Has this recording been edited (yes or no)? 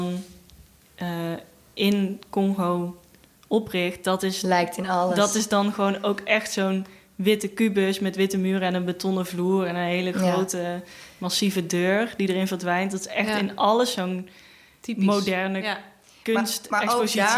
no